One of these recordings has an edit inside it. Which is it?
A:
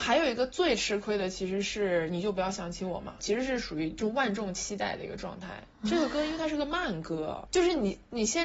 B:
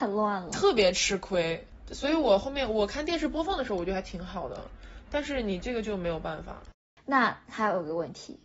A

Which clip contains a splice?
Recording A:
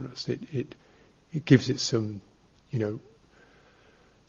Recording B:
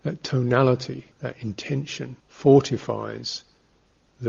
B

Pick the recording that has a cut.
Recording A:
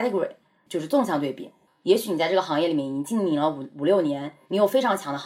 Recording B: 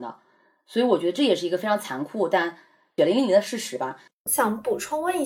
B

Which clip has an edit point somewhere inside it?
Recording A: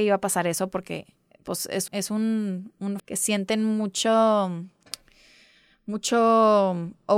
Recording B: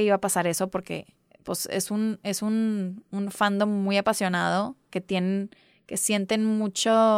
A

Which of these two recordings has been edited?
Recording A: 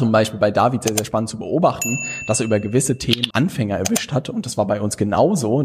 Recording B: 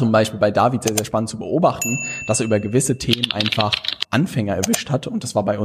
A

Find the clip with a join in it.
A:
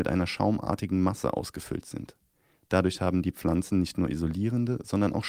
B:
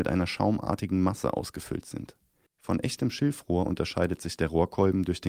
B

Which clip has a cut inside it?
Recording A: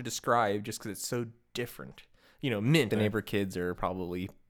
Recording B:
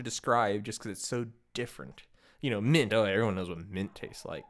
A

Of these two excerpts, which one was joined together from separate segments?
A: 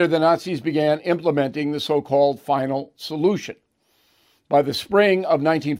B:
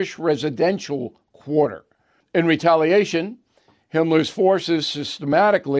B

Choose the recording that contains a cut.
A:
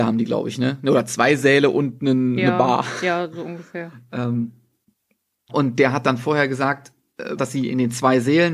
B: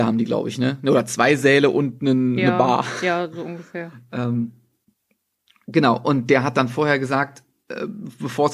A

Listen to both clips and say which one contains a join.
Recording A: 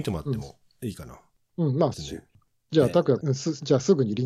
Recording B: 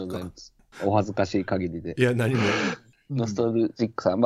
A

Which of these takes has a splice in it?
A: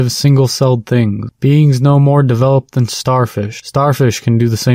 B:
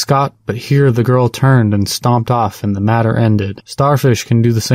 B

